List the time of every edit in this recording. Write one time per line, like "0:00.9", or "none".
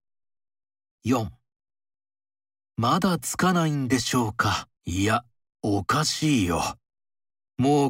0:00.9
0:04.8